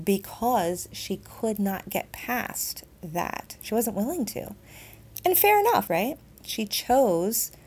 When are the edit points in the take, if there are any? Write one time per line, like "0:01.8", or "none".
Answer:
0:05.9